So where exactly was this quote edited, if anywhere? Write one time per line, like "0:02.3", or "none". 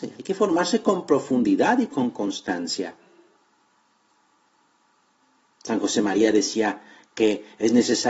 none